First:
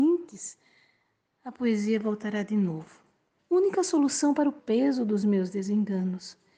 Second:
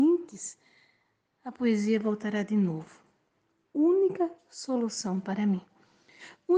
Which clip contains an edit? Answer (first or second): first